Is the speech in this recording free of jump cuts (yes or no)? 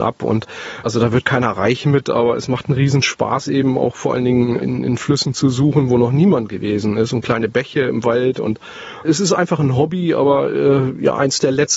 yes